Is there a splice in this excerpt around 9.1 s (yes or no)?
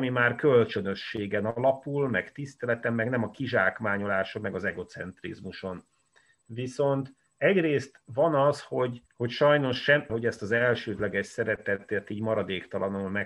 yes